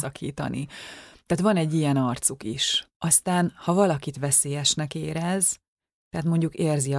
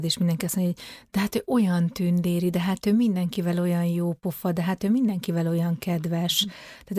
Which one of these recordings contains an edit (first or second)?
first